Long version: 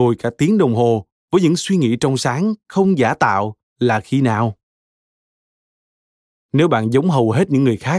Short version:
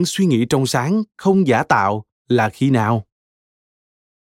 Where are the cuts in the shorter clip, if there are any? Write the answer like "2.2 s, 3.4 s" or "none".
none